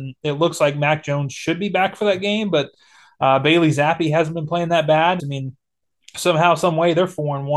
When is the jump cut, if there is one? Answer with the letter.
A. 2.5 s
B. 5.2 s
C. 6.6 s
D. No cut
B